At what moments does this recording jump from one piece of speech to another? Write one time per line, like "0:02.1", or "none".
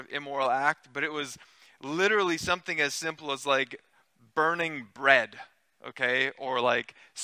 none